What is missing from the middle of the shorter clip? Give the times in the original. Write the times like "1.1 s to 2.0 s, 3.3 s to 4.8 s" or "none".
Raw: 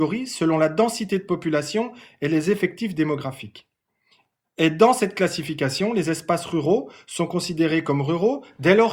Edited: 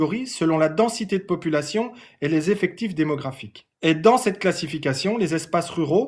3.7 s to 4.5 s